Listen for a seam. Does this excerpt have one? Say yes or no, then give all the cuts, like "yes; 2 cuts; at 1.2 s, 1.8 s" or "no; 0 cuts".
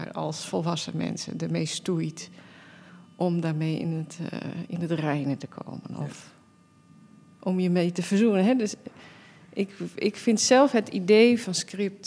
no; 0 cuts